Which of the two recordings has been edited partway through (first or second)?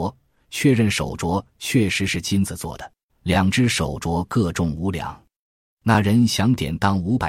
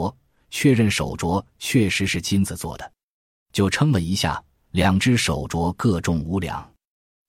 first